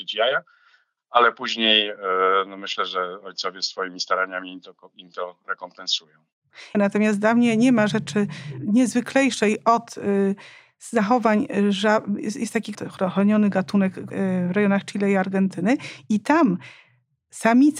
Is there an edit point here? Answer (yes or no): yes